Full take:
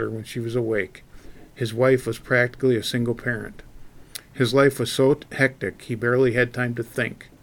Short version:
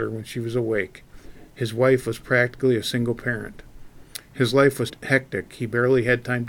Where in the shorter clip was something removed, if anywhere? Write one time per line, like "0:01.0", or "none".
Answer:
0:04.9